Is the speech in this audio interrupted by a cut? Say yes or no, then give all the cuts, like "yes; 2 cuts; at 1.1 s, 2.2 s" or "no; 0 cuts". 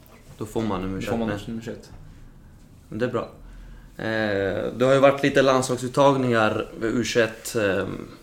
no; 0 cuts